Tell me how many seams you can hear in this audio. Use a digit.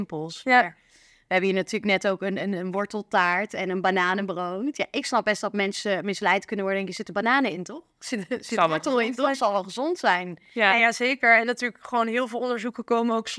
0